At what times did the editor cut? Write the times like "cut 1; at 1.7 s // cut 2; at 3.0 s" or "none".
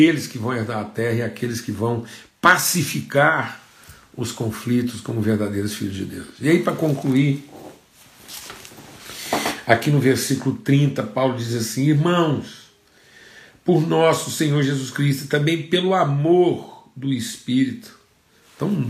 none